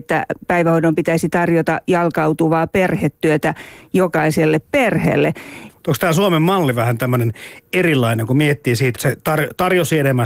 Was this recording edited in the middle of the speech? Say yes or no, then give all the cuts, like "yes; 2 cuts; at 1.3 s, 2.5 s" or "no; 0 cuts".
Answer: yes; 2 cuts; at 5.7 s, 8.9 s